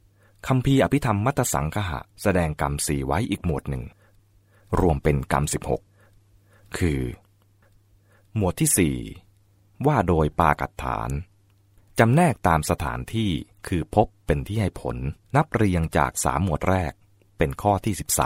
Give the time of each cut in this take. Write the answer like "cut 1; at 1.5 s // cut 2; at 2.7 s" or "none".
cut 1; at 2.1 s // cut 2; at 15.2 s